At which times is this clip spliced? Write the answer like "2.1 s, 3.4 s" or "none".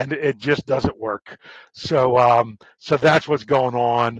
none

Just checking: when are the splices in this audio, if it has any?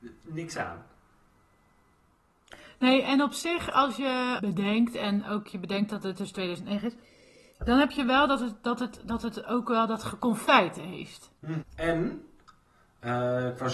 4.4 s, 11.6 s

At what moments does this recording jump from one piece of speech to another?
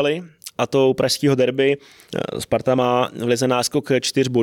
none

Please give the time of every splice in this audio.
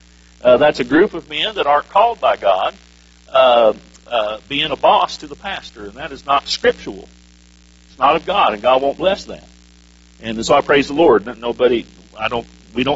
none

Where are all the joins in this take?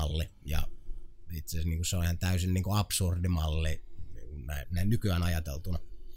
4.6 s

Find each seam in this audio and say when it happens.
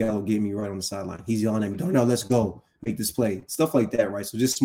none

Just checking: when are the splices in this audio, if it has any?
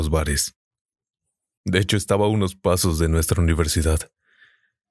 1.6 s

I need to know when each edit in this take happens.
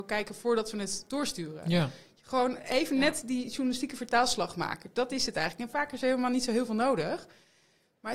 none

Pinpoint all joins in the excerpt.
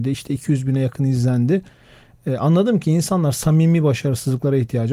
none

